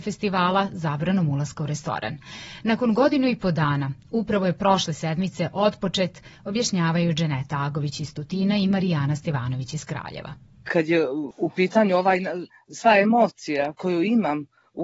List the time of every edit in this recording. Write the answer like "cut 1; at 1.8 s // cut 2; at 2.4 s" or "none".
none

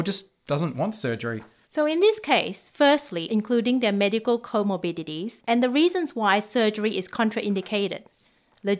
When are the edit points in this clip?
cut 1; at 1.6 s // cut 2; at 3.3 s // cut 3; at 5.4 s

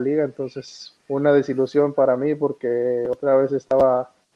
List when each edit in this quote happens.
cut 1; at 1.0 s

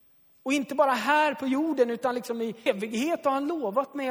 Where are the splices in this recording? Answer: cut 1; at 2.7 s

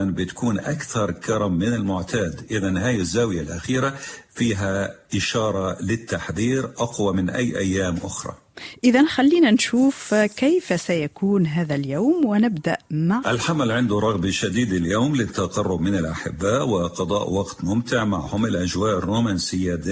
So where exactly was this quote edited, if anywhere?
cut 1; at 13.2 s

